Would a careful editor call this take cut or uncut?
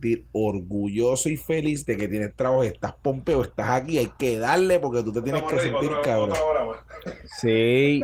uncut